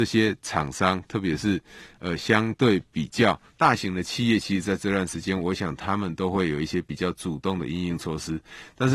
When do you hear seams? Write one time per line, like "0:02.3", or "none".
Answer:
0:03.5